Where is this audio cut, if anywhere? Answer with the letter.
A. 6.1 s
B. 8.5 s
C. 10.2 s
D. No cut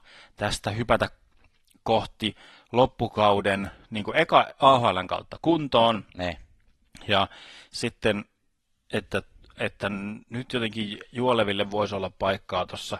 D